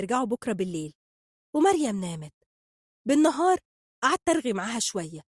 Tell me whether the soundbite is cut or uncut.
uncut